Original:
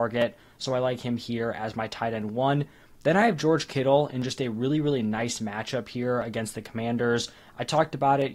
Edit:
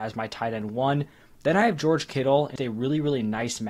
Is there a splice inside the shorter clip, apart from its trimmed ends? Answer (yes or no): yes